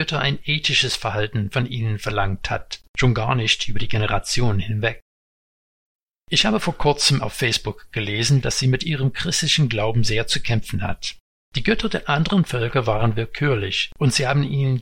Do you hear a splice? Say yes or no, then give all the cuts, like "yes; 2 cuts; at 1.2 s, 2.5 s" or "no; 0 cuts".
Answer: yes; 3 cuts; at 2.9 s, 8.4 s, 11.4 s